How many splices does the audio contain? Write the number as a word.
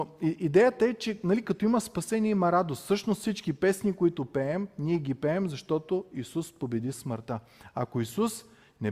zero